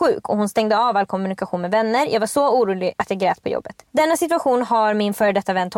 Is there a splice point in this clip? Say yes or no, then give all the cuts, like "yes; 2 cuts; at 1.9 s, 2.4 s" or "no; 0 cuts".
no; 0 cuts